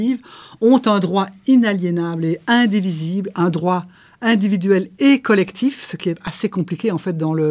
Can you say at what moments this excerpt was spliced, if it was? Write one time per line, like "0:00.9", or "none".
none

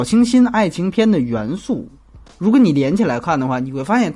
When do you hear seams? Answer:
none

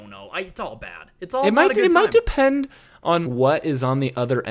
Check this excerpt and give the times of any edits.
0:03.2

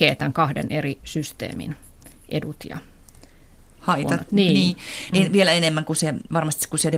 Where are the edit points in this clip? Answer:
0:05.1

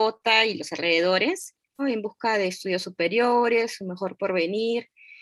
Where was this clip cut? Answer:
0:01.8

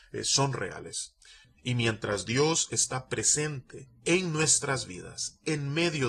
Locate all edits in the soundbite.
0:01.4
0:04.0

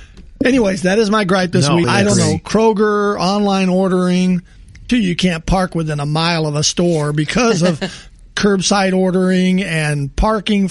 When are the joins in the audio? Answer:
0:01.8
0:04.9

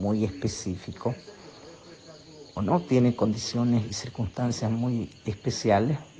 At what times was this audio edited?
0:02.6

